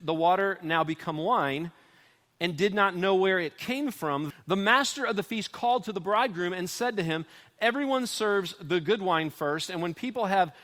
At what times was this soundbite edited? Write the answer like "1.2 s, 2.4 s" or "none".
4.3 s